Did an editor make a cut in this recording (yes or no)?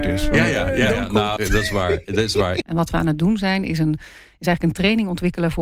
yes